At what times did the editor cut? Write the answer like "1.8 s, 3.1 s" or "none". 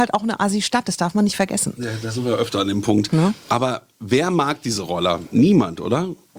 3.4 s